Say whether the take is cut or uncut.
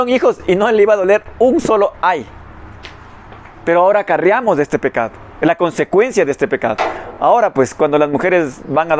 uncut